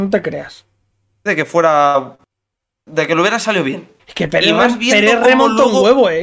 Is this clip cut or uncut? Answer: cut